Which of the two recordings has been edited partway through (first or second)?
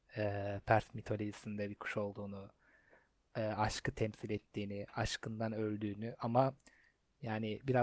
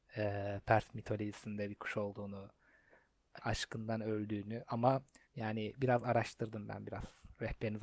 second